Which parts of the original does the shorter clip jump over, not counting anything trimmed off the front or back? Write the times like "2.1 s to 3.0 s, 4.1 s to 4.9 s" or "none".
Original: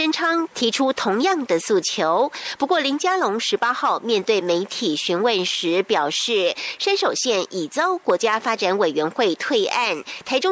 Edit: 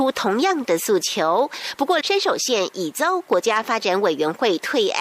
2.8 s to 6.8 s